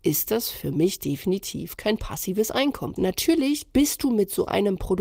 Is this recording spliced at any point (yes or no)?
yes